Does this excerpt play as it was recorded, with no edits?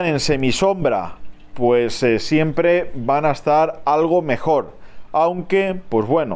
yes; 0 cuts

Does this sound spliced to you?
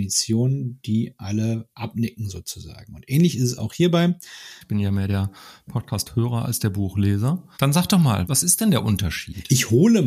yes; 1 cut; at 4.6 s

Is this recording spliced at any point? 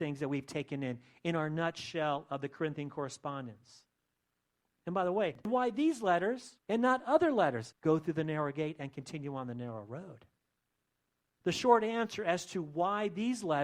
yes; 3 cuts; at 6.6 s, 7.7 s, 11.4 s

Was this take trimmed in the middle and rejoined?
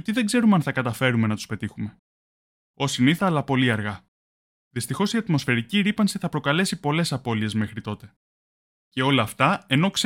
yes; 1 cut; at 3.2 s

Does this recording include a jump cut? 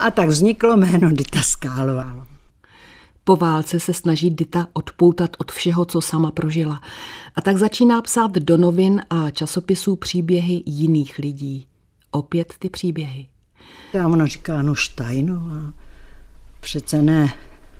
yes; 1 cut; at 13.9 s

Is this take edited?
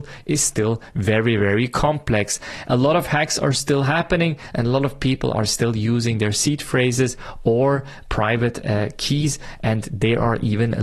no; 0 cuts

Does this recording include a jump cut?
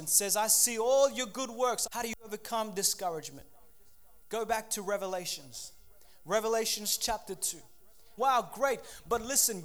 yes; 2 cuts; at 1.9 s, 8.2 s

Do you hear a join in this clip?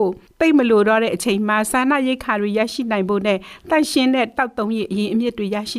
no; 0 cuts

